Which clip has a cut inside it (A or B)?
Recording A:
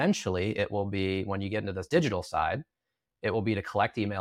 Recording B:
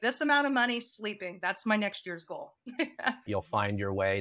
B